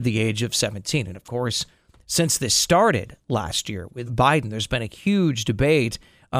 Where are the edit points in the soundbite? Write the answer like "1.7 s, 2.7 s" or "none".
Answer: 4.1 s